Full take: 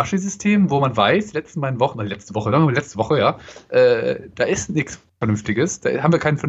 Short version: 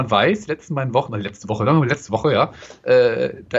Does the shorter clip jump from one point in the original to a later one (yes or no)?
no